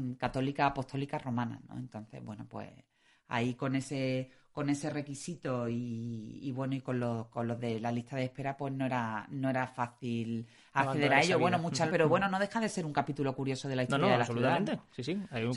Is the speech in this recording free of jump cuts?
no; 1 cut; at 11.9 s

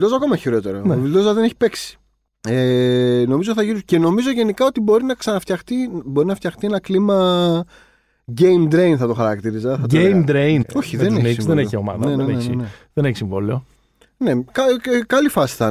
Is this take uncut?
no; 1 cut; at 10.6 s

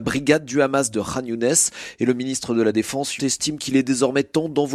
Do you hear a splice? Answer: yes; 1 cut; at 3.2 s

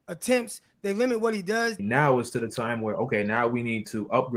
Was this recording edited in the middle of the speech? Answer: yes; 1 cut; at 1.8 s

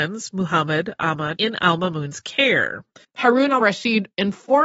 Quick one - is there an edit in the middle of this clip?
yes; 2 cuts; at 1.4 s, 3.0 s

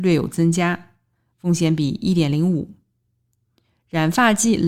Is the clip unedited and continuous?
yes; 0 cuts

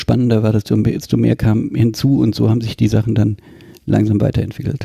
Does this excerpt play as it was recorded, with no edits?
yes; 0 cuts

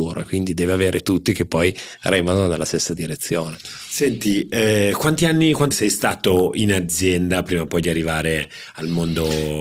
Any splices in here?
yes; 1 cut; at 5.7 s

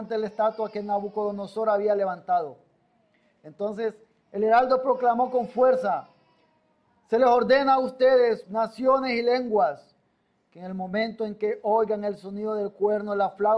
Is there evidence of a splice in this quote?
yes; 1 cut; at 8.4 s

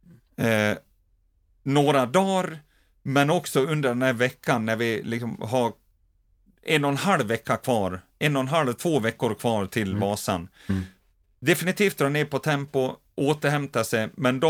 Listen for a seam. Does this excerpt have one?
no; 0 cuts

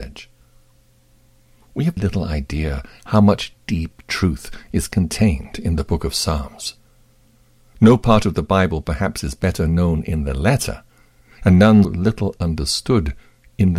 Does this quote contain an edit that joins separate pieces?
yes; 2 cuts; at 2.0 s, 11.8 s

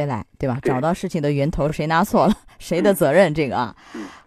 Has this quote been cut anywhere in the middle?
no; 0 cuts

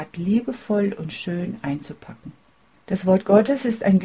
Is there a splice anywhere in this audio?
yes; 1 cut; at 2.7 s

